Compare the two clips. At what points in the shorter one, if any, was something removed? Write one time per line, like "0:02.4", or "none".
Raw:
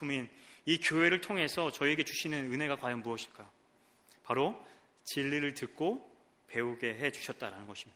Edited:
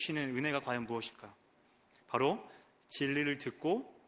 none